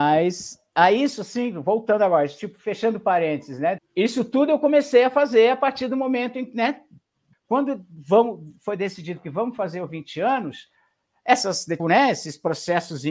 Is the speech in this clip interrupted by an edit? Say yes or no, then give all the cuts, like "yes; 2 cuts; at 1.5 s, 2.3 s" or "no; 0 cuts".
yes; 3 cuts; at 3.8 s, 7.3 s, 11.8 s